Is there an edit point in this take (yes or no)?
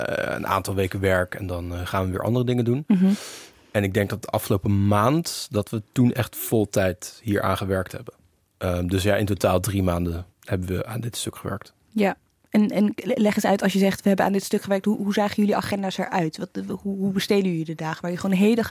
yes